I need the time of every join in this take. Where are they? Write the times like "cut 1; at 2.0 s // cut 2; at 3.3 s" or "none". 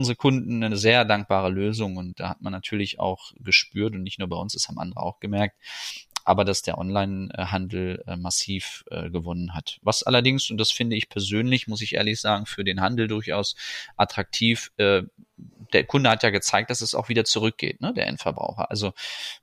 none